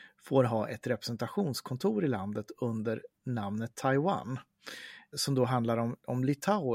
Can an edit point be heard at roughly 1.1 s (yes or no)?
no